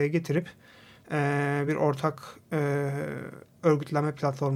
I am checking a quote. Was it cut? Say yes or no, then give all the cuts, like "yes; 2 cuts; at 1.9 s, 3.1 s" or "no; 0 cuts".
no; 0 cuts